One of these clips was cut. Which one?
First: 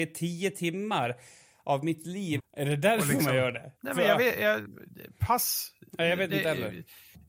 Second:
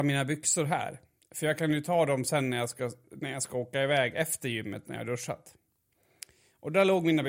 first; 2 cuts; at 2.4 s, 3.8 s

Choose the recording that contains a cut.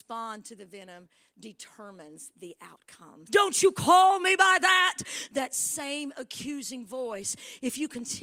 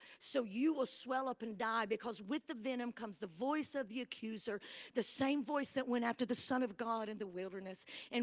first; 2 cuts; at 3.3 s, 5.3 s

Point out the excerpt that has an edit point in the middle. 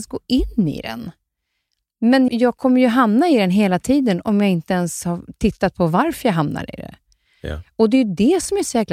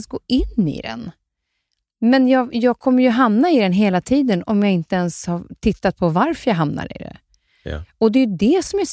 first; 1 cut; at 2.3 s

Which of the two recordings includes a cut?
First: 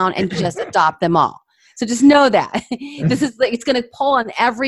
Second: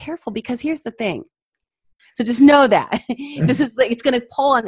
second; 1 cut; at 2.0 s

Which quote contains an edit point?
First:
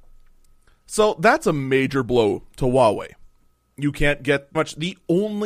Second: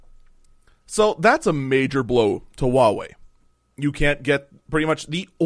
first; 1 cut; at 4.5 s

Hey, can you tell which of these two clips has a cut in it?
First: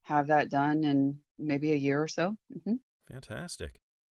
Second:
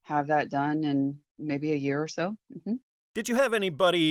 second; 1 cut; at 2.9 s

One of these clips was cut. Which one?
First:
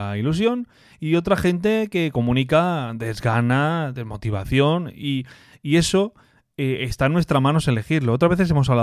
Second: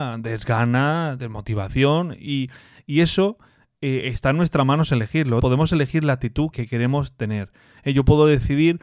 second; 2 cuts; at 5.4 s, 6.5 s

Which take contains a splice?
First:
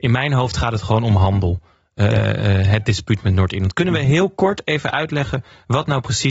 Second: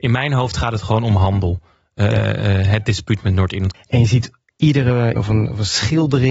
second; 2 cuts; at 3.7 s, 5.2 s

